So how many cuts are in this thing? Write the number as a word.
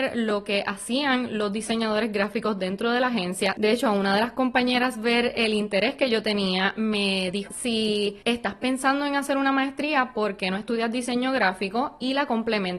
one